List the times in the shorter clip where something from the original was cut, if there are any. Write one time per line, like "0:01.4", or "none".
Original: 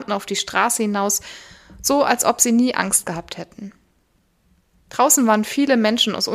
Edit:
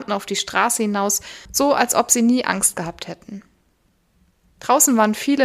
0:01.5